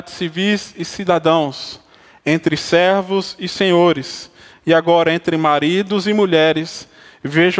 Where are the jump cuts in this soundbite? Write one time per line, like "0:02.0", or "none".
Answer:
none